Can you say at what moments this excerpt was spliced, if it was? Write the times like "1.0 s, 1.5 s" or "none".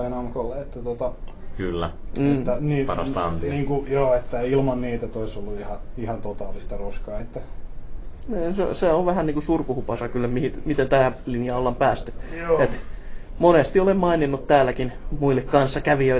7.2 s